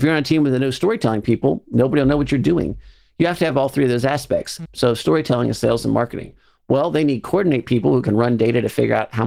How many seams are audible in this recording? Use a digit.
1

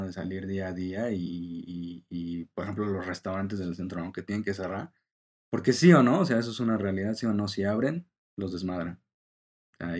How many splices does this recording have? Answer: 0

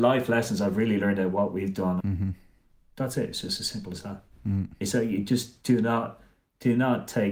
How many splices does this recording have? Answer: 1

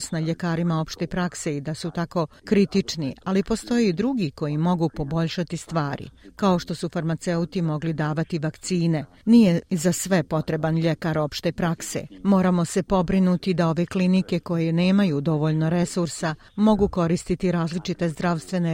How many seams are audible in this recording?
0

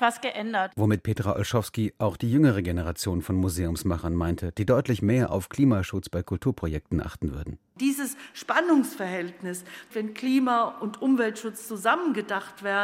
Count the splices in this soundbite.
2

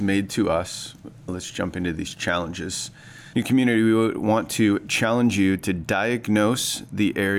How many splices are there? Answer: 2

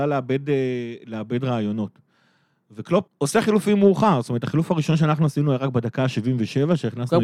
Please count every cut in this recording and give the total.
1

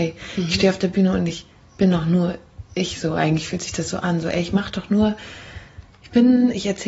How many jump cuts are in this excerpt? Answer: 0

